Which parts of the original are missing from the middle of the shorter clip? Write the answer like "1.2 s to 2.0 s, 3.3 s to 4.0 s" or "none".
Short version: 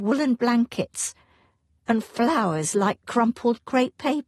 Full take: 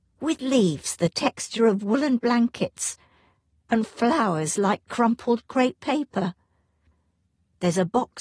none